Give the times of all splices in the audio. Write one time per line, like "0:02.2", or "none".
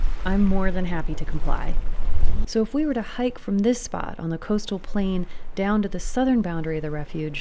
0:02.4